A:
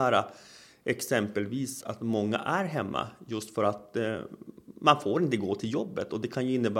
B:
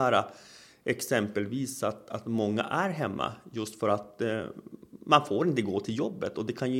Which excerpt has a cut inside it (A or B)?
A